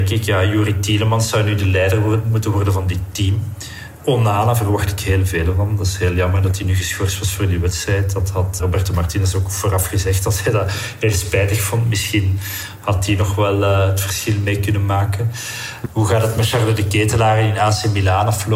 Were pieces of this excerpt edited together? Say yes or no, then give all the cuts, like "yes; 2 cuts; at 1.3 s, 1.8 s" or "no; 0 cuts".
yes; 2 cuts; at 8.6 s, 15.8 s